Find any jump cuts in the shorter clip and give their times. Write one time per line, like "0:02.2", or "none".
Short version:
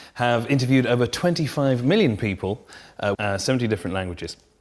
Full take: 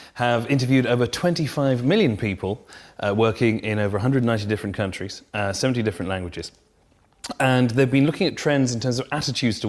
0:03.1